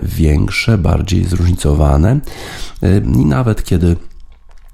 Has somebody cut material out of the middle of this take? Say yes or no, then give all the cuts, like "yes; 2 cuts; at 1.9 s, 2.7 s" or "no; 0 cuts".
yes; 1 cut; at 3.0 s